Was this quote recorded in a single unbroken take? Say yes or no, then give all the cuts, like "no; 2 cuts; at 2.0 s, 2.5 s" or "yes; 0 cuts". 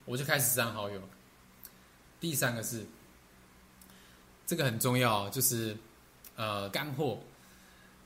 no; 2 cuts; at 2.1 s, 6.7 s